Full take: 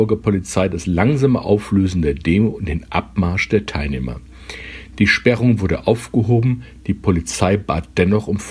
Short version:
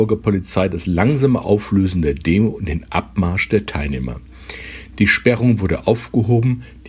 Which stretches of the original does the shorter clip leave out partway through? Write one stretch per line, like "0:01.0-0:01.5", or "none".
none